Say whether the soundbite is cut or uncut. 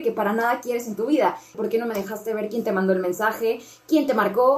cut